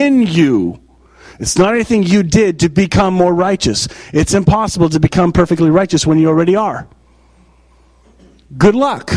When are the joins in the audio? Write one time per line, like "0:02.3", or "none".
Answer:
none